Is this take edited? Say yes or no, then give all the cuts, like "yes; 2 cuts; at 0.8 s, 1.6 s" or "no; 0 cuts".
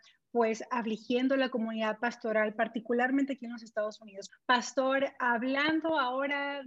yes; 1 cut; at 4.3 s